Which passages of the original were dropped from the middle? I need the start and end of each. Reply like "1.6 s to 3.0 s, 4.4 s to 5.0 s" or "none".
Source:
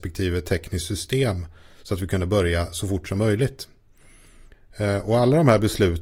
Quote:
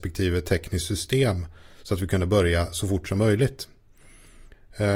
none